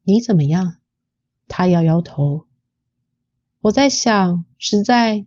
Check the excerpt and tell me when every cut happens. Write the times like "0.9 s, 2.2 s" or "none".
1.4 s